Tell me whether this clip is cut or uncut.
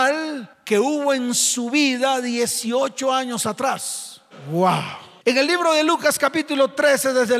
cut